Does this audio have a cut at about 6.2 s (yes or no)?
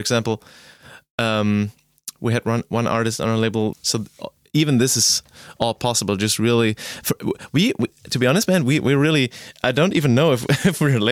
no